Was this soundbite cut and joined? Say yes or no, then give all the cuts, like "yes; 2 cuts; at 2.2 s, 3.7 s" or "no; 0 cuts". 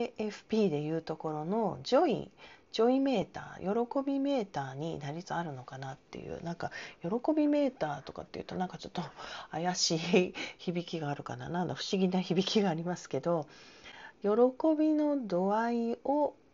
yes; 1 cut; at 5.2 s